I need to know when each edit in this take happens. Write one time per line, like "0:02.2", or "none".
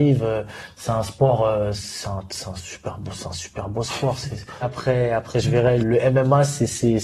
0:04.6
0:05.8